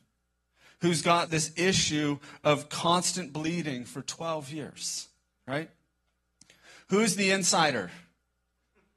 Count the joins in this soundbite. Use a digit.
1